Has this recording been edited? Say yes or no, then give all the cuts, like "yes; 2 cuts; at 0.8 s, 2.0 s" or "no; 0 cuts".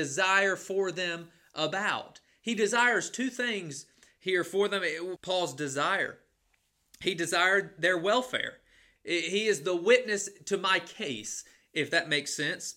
yes; 2 cuts; at 5.2 s, 9.0 s